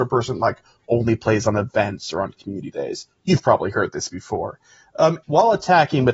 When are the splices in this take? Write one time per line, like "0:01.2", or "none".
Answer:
0:05.2